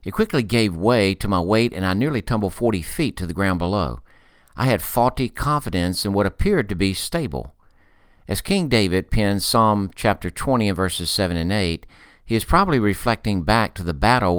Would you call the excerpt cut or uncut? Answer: uncut